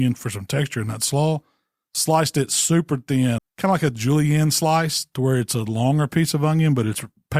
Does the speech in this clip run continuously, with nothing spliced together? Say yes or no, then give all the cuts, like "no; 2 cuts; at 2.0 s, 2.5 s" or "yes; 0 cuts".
no; 1 cut; at 3.4 s